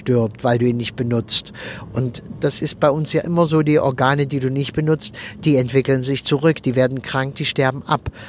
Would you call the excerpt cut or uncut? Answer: uncut